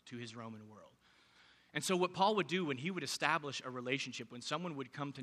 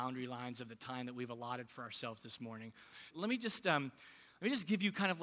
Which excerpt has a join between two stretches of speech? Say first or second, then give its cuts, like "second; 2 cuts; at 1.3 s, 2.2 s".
second; 1 cut; at 3.1 s